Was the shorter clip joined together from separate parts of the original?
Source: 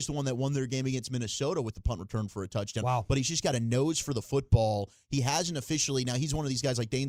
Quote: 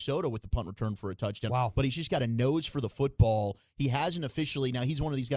no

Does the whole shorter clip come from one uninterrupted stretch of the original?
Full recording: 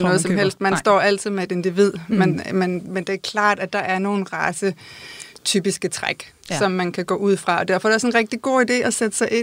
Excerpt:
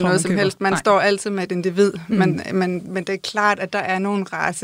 yes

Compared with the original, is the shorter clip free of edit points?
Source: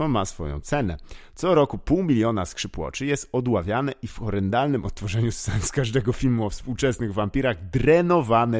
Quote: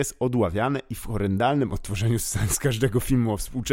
yes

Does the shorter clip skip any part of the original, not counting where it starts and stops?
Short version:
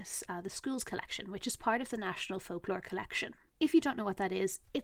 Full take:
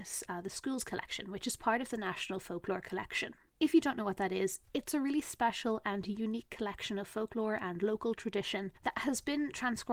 no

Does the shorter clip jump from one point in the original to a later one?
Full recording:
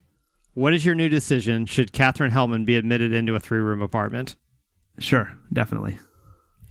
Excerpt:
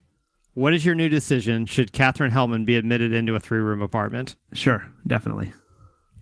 yes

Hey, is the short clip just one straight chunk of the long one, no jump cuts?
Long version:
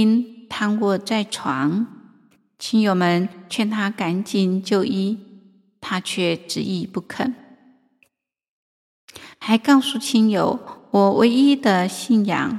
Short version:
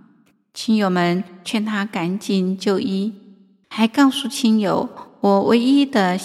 no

